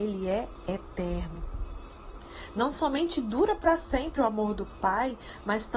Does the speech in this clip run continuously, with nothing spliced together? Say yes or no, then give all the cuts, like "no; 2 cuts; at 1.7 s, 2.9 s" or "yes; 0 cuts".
yes; 0 cuts